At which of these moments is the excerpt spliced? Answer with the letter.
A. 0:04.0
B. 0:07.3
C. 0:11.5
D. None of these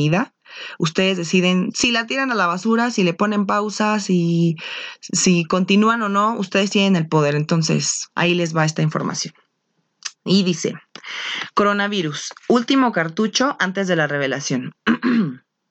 D